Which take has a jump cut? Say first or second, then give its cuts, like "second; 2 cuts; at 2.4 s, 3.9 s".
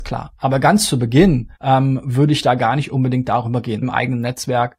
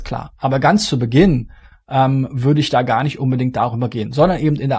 first; 2 cuts; at 1.5 s, 3.8 s